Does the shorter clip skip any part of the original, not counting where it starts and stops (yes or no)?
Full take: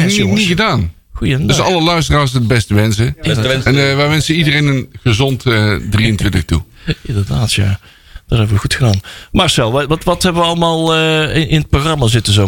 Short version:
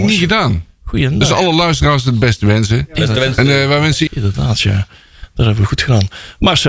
yes